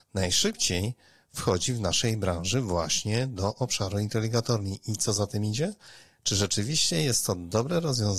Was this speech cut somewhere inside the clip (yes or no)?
no